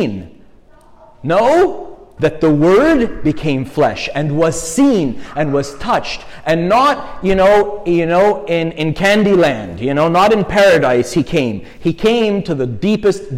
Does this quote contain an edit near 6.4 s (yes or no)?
no